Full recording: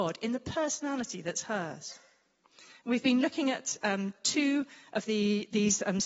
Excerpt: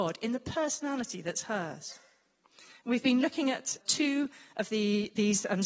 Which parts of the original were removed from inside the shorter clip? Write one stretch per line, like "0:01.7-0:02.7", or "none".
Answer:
0:03.8-0:04.2